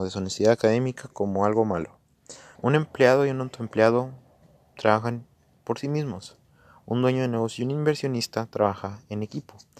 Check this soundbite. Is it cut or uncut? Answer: cut